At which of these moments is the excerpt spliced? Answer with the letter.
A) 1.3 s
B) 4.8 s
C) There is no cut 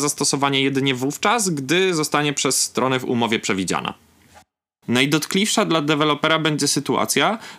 B